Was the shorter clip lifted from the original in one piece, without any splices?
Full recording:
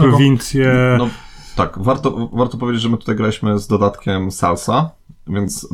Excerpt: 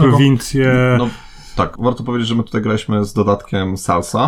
no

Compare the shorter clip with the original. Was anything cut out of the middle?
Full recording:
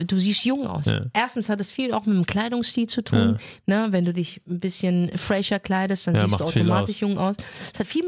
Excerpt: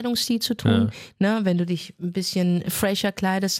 no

